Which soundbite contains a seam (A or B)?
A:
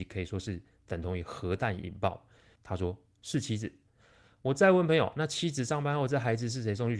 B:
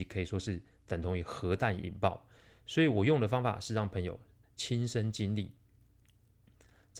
A